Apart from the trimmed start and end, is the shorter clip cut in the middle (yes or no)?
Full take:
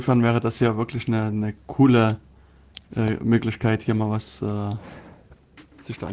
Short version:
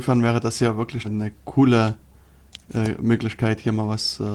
yes